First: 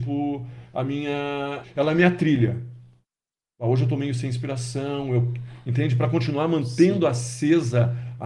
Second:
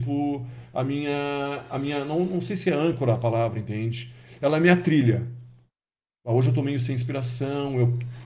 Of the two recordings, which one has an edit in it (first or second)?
first